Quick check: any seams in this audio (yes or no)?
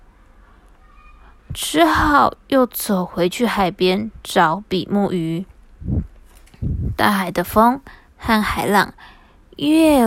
yes